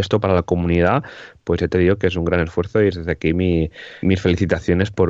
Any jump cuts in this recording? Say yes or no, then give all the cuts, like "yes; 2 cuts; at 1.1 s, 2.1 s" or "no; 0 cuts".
yes; 1 cut; at 4.0 s